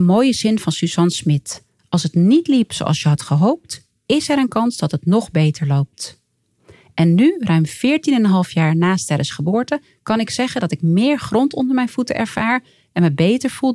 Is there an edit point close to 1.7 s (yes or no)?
no